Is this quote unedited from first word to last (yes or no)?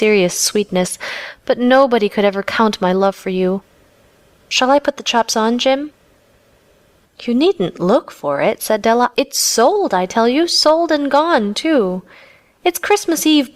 no